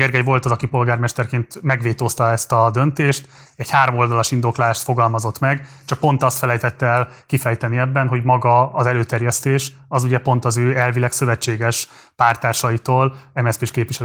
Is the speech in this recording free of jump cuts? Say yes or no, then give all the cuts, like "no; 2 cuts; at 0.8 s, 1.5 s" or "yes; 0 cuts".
yes; 0 cuts